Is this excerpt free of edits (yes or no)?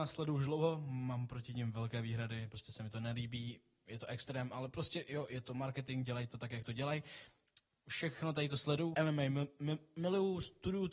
no